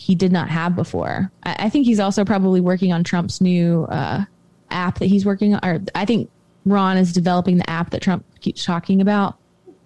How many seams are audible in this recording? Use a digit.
1